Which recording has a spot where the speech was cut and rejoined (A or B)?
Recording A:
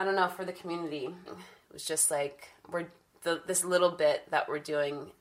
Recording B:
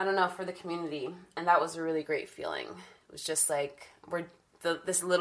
A